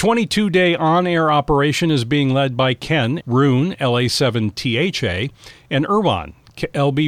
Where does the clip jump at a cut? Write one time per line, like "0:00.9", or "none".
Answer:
0:03.2